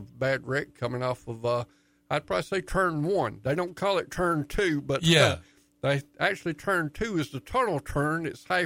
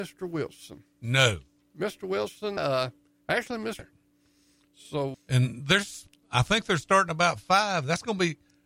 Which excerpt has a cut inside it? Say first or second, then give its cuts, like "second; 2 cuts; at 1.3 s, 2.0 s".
second; 3 cuts; at 2.6 s, 3.8 s, 5.1 s